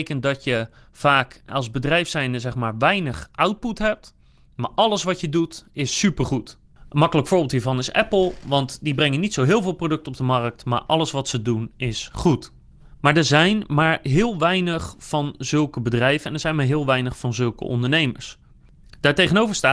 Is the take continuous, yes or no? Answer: yes